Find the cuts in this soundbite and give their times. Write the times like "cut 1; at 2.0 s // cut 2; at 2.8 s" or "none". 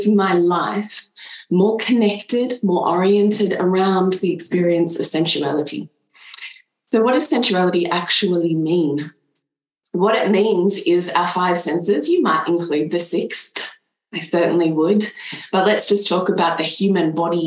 none